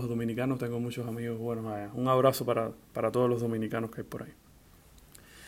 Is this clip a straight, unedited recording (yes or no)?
yes